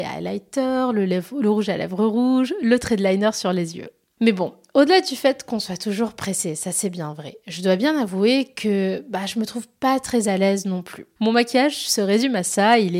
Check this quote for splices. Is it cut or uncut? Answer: cut